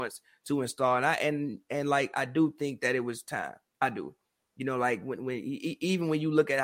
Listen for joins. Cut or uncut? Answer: uncut